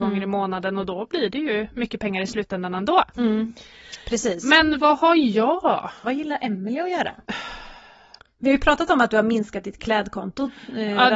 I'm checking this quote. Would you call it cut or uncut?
cut